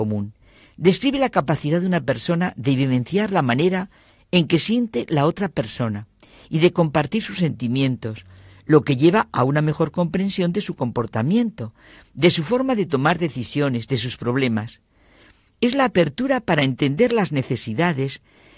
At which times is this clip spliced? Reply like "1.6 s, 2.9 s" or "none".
none